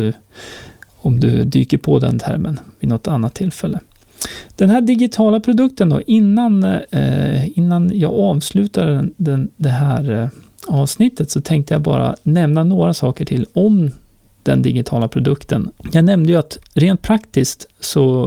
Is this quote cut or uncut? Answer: cut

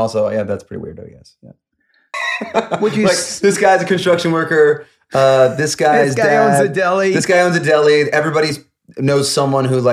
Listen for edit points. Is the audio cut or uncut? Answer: cut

